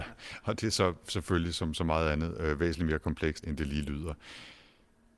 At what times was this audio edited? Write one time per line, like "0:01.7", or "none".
0:03.4